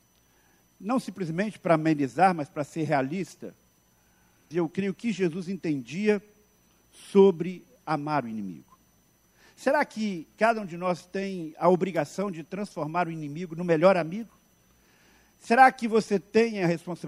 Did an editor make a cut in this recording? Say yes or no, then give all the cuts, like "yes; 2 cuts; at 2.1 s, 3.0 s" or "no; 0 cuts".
yes; 1 cut; at 4.5 s